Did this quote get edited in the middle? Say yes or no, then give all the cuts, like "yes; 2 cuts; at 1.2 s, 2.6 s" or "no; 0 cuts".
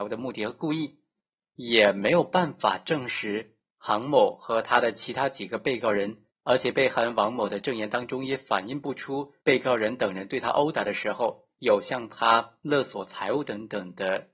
yes; 3 cuts; at 1.5 s, 6.3 s, 9.4 s